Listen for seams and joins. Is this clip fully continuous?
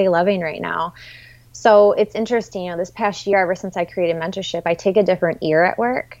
yes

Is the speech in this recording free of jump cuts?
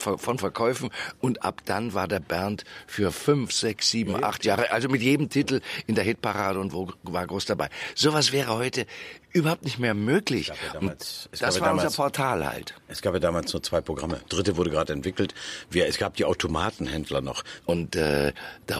no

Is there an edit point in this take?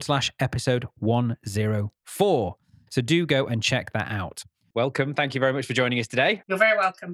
yes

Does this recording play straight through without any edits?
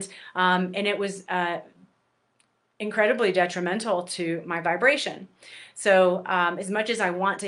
yes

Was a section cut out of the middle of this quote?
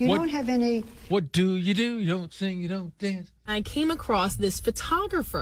yes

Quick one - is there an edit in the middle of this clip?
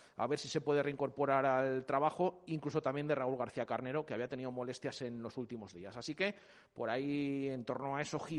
no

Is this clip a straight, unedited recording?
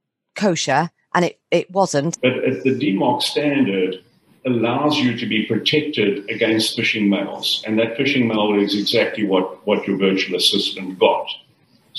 no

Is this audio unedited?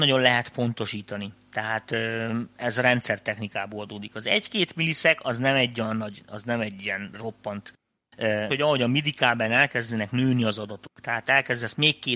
no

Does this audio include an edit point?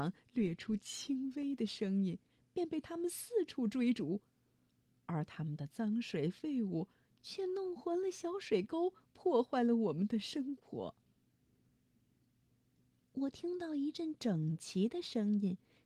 no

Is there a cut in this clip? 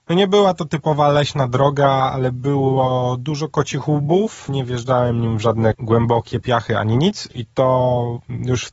yes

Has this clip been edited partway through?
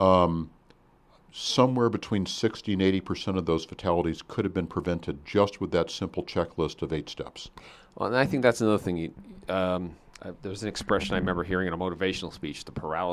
no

